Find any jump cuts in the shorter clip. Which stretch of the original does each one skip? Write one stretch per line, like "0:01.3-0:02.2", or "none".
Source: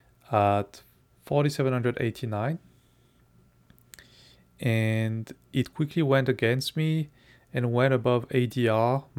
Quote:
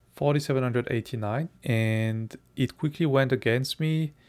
0:02.6-0:04.5